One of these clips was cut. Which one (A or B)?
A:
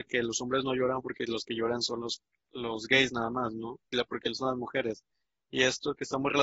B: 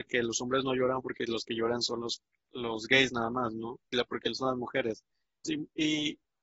B